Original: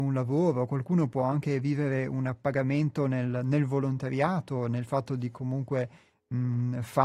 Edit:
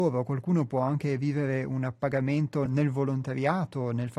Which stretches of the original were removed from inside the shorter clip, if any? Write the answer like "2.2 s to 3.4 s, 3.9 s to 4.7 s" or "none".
3.1 s to 3.4 s